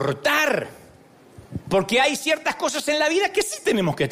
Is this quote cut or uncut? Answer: uncut